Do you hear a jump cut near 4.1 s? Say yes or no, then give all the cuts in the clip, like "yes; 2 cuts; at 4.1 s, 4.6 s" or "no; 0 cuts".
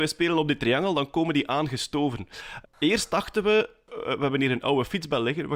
no; 1 cut; at 2.6 s